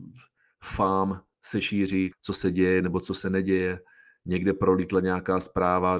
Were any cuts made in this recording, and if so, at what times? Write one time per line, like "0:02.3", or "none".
0:02.1